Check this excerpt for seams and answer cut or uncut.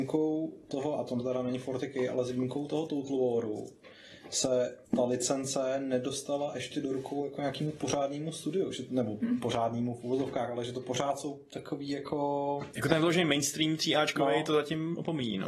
cut